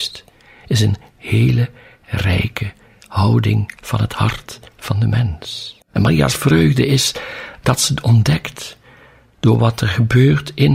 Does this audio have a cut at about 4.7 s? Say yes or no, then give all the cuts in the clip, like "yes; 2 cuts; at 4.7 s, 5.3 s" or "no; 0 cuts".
yes; 2 cuts; at 4.7 s, 5.8 s